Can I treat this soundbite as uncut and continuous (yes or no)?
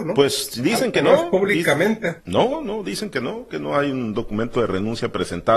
yes